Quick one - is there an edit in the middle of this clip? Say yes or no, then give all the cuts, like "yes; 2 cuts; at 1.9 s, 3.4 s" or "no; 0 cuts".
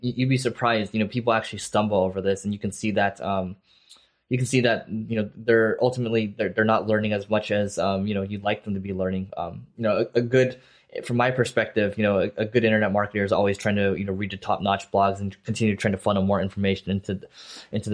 no; 0 cuts